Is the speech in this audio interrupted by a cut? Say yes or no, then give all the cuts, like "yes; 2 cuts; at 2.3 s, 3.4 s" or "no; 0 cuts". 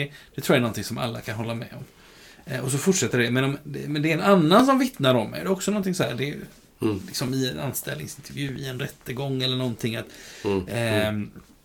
no; 0 cuts